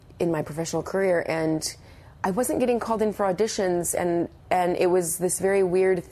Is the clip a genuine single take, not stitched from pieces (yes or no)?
no